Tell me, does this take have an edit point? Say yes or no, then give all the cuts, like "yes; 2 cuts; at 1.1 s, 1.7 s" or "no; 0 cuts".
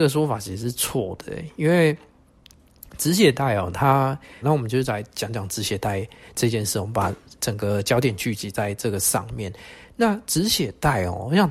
yes; 1 cut; at 4.4 s